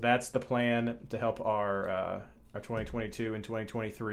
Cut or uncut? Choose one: uncut